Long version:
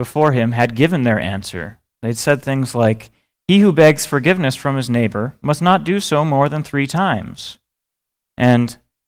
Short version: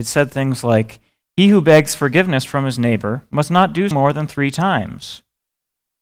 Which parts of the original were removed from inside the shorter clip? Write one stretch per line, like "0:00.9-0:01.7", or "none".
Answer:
0:06.0-0:06.3